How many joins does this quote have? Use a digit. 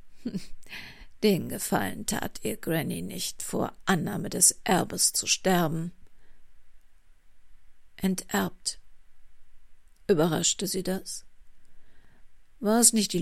0